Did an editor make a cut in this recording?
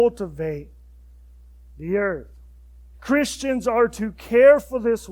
yes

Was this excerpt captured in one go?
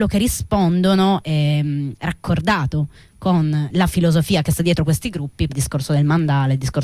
no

